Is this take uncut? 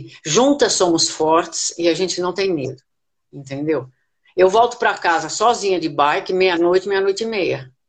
yes; 0 cuts

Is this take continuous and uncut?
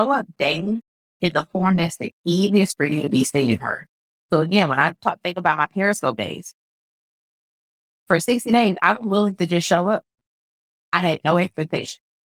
yes; 0 cuts

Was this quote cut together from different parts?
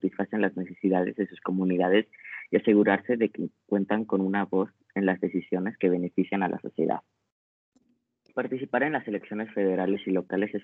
yes; 1 cut; at 8.3 s

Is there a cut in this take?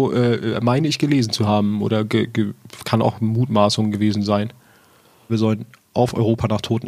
yes; 1 cut; at 5.3 s

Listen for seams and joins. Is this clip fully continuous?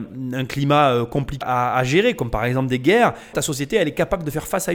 no; 2 cuts; at 1.4 s, 3.3 s

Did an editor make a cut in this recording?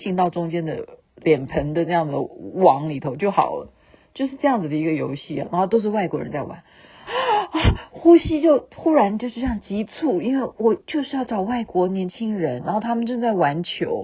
yes; 1 cut; at 7.1 s

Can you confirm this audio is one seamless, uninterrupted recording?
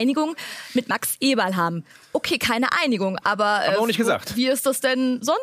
yes; 0 cuts

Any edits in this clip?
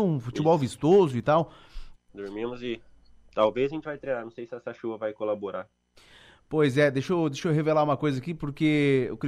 yes; 1 cut; at 2.0 s

